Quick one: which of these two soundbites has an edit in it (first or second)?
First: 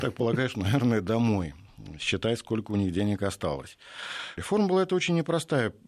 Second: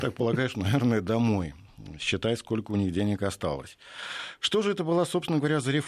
first